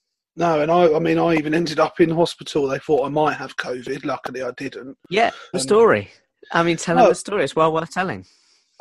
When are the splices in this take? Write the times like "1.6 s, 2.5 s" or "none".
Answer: 5.5 s

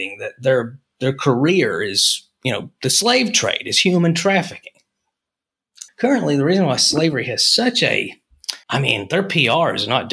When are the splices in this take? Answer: 5.9 s, 8.6 s

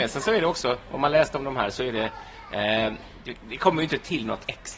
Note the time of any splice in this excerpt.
none

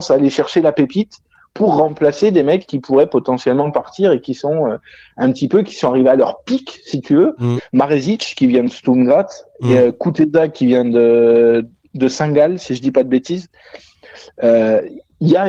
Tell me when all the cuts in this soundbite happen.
7.6 s

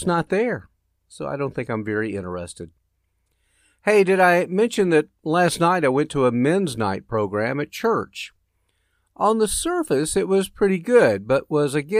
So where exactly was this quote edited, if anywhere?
none

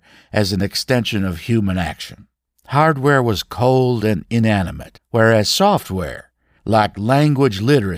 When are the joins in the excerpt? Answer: 2.5 s, 5.0 s

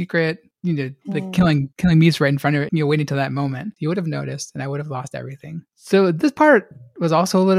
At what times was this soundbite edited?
2.7 s, 3.8 s

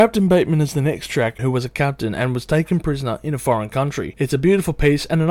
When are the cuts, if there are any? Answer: 1.4 s

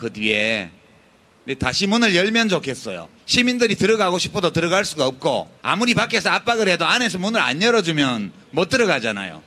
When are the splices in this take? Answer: 3.2 s, 5.6 s

